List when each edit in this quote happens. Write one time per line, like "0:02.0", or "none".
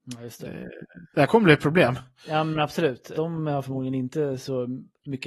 0:01.1
0:03.1